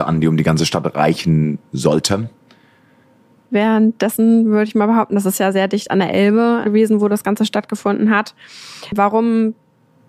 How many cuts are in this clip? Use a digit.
2